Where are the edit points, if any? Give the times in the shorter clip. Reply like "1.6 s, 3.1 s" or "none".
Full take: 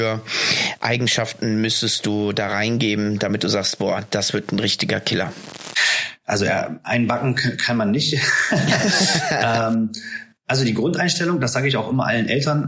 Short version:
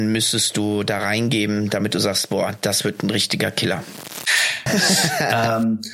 4.7 s